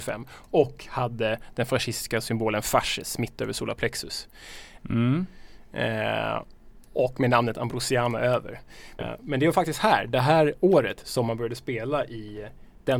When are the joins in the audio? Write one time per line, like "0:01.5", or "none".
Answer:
0:04.8
0:09.0
0:11.0